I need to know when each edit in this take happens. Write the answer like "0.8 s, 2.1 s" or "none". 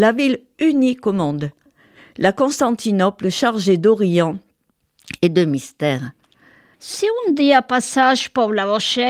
6.7 s